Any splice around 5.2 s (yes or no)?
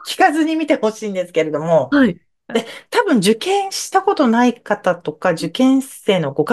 no